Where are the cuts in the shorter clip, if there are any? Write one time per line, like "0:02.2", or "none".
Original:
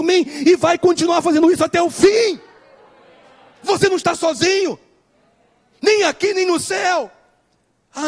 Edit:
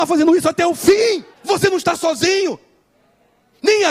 0:01.3